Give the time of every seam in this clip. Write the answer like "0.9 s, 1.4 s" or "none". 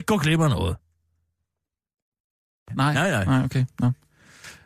2.7 s